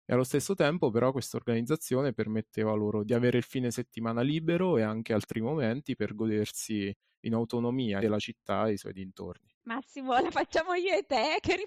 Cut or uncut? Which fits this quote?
cut